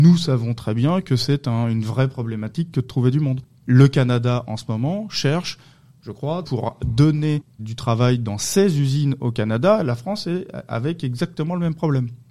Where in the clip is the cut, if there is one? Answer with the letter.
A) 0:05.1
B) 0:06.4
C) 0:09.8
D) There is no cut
B